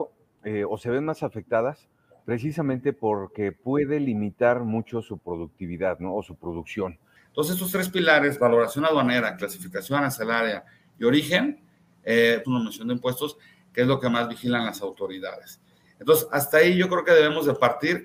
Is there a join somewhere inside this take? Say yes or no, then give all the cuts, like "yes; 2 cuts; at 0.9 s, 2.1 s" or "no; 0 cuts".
yes; 2 cuts; at 7.2 s, 12.4 s